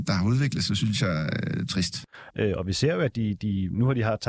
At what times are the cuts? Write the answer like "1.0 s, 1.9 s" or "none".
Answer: 2.3 s

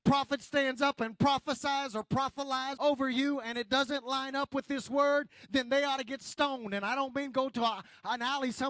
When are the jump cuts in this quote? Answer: 2.8 s

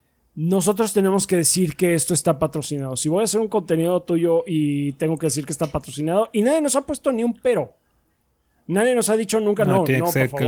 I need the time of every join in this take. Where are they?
none

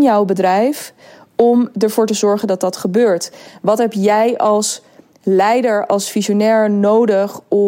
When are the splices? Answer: none

